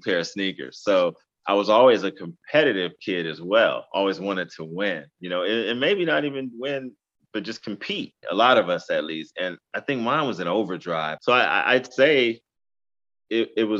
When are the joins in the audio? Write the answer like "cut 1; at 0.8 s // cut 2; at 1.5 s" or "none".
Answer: cut 1; at 8.2 s // cut 2; at 11.2 s